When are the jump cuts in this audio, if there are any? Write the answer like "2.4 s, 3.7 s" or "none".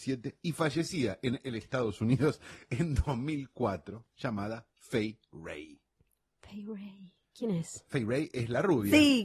none